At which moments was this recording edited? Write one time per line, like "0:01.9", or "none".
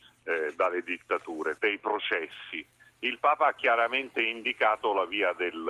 0:01.6

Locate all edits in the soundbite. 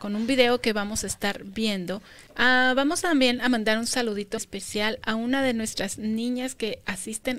0:02.3
0:04.4

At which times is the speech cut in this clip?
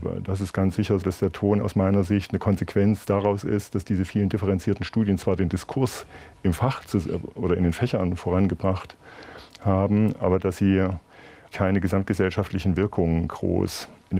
0:01.0
0:11.5

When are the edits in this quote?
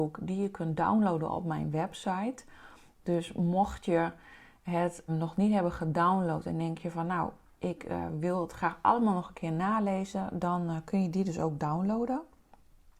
0:05.1

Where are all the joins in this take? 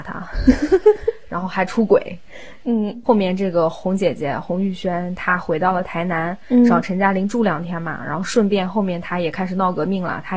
none

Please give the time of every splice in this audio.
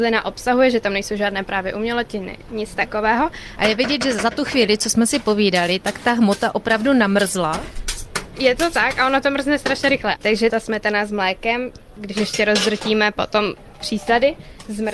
0:03.6
0:10.2

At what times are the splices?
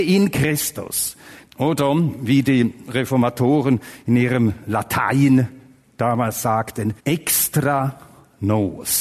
0:01.5
0:07.0

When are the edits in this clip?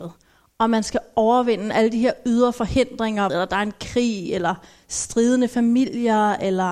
0:03.3

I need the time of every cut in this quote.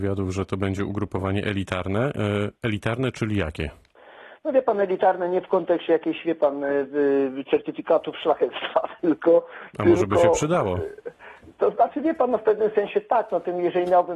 none

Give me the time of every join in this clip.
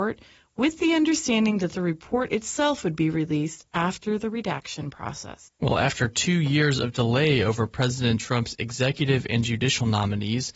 none

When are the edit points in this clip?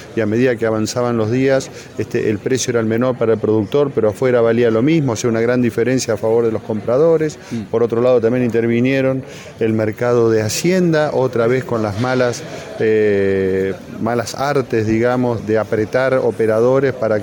0:15.4

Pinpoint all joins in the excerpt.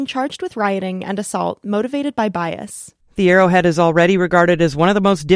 0:03.0

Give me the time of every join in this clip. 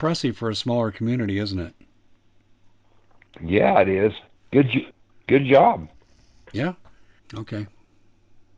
0:04.4
0:07.2

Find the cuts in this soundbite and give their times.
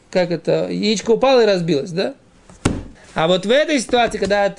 0:03.0

